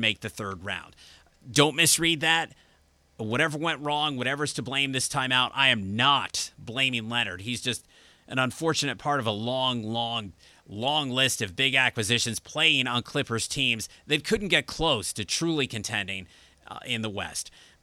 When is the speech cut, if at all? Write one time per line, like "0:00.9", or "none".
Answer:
none